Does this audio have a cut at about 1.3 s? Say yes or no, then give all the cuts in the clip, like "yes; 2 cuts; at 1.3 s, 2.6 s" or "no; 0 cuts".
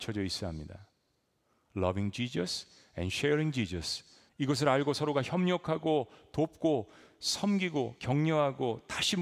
no; 1 cut; at 4.3 s